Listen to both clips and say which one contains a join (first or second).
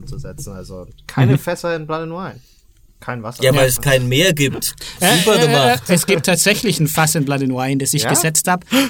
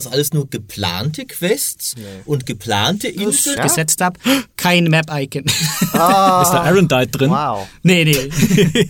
second